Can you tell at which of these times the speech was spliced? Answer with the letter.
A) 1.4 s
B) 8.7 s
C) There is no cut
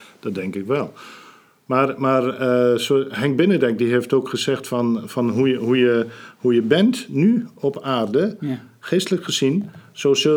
C